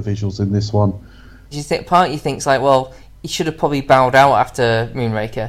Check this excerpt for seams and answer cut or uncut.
cut